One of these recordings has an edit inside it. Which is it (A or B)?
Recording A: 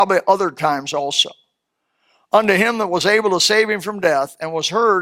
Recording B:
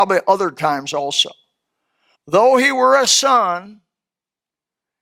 B